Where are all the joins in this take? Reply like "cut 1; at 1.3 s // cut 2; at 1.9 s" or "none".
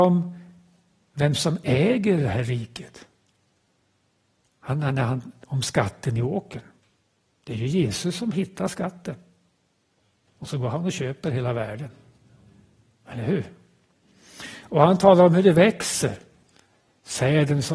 none